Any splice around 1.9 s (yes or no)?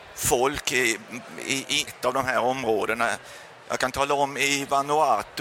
yes